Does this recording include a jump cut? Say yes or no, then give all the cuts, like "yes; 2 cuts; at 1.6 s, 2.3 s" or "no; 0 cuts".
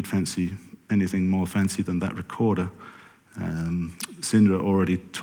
no; 0 cuts